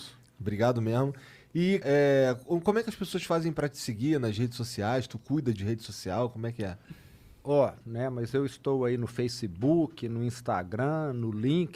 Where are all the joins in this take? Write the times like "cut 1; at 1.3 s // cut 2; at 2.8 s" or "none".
cut 1; at 1.8 s // cut 2; at 7.8 s